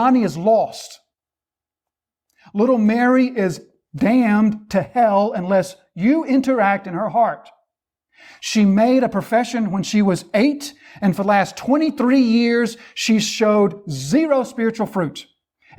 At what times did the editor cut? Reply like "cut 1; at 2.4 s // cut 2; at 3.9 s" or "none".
none